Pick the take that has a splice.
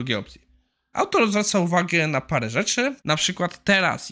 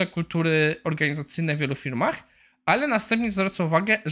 first; 2 cuts; at 0.9 s, 3.0 s

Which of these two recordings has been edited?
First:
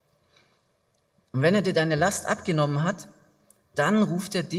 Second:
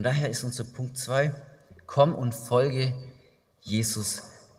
first; 1 cut; at 1.2 s

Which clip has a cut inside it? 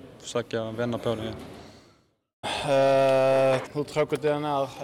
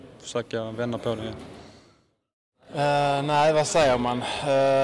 first; 2 cuts; at 2.4 s, 3.7 s

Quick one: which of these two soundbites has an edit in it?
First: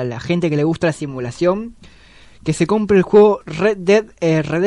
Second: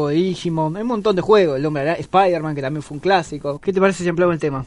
second; 1 cut; at 3.6 s

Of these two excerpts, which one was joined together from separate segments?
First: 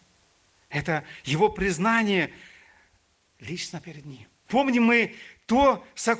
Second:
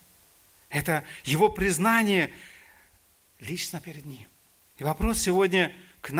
first; 1 cut; at 4.5 s

